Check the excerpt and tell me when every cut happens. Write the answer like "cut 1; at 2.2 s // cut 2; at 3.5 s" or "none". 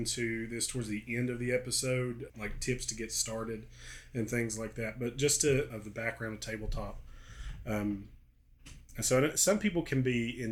cut 1; at 2.3 s // cut 2; at 5.7 s